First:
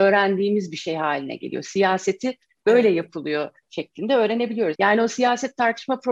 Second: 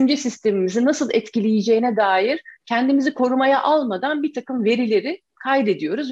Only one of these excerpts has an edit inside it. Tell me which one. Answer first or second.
first